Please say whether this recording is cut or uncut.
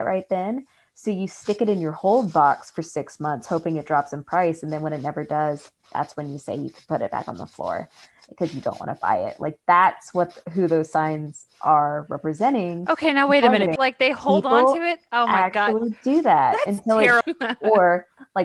cut